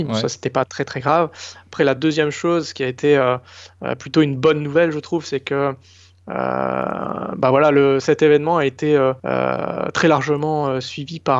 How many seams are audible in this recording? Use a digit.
1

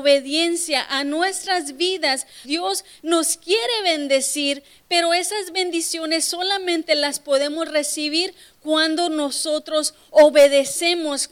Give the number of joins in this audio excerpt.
1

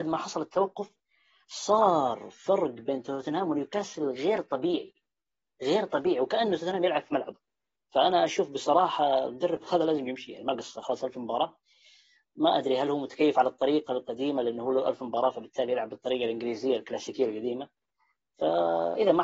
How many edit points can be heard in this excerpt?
0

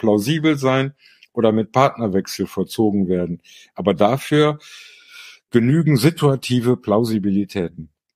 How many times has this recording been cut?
0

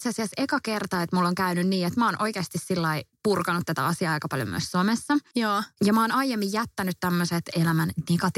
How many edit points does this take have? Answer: 0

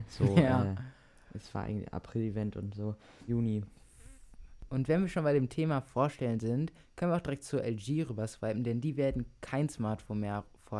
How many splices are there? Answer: 1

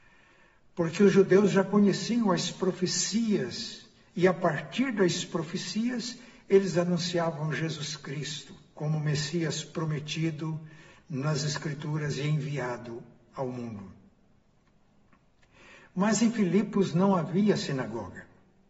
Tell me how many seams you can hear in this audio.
1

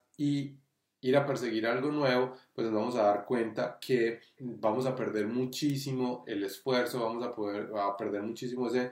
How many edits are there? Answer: 1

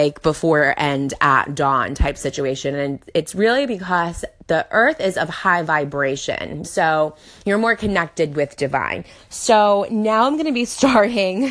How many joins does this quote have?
1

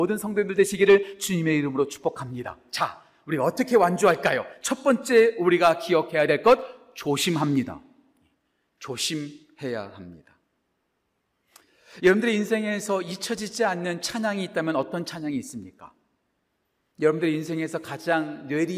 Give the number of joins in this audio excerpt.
0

